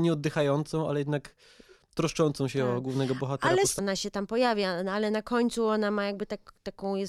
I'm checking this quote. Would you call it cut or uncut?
cut